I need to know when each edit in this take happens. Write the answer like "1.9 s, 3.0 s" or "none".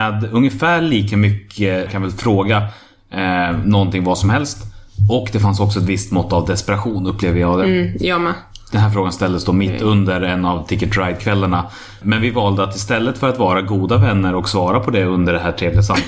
1.9 s, 12.0 s